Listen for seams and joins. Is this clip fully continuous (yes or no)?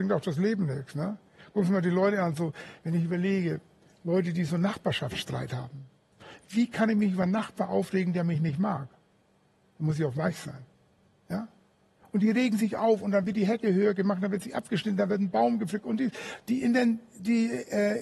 yes